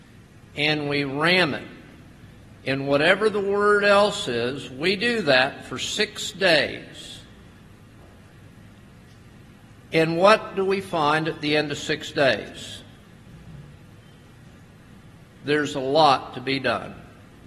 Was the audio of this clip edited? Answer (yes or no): no